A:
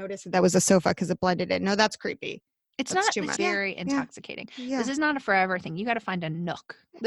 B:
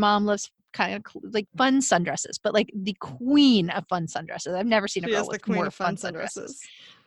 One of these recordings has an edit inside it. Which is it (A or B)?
A